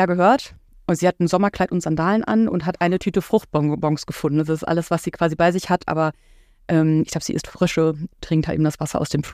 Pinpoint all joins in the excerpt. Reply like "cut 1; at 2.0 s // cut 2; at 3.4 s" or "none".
none